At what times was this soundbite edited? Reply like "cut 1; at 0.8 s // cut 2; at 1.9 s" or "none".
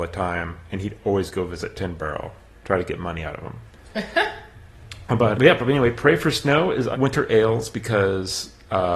cut 1; at 5.3 s // cut 2; at 6.9 s